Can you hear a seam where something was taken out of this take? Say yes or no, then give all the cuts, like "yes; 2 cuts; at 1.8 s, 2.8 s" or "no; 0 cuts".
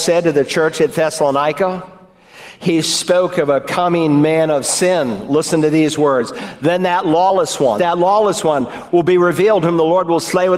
yes; 1 cut; at 7.8 s